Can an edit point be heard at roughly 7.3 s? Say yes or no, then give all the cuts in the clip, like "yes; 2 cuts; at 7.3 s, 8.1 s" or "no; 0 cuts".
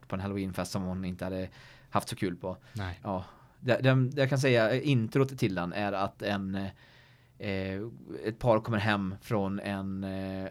no; 1 cut; at 3.0 s